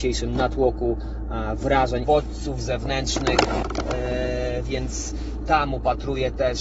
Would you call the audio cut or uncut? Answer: cut